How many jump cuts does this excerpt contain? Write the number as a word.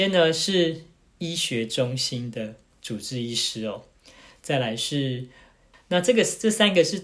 one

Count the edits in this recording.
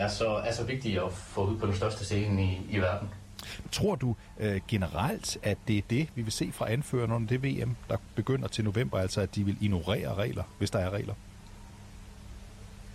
one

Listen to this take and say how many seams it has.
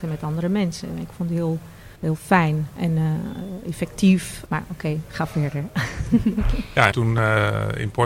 three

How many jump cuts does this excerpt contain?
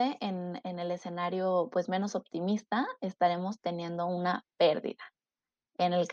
zero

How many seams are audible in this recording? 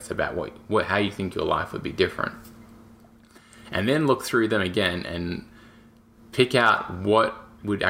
zero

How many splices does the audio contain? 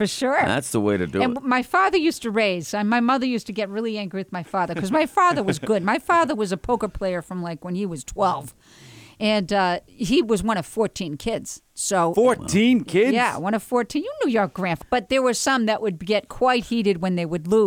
one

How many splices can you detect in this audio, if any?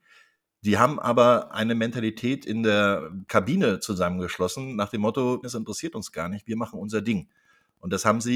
one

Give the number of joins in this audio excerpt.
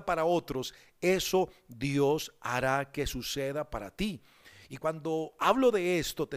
one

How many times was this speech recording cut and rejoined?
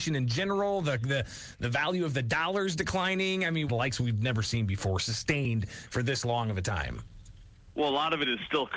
one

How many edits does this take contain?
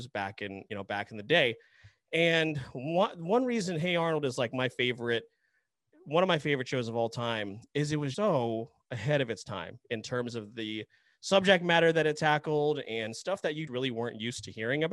two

